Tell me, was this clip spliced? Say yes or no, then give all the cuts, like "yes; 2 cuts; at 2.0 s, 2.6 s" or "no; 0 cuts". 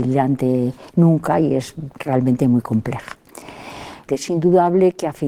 yes; 1 cut; at 4.1 s